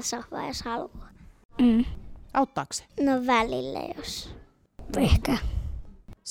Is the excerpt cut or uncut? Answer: cut